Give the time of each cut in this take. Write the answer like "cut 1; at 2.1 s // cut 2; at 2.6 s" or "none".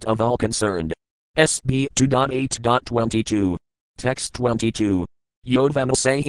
cut 1; at 5.3 s